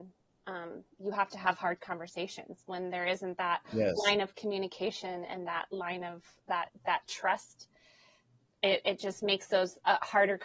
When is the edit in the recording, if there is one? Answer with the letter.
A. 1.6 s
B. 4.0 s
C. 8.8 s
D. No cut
D